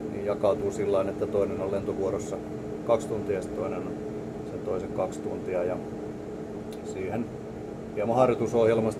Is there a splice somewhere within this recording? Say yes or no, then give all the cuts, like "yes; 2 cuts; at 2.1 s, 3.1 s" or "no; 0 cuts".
no; 0 cuts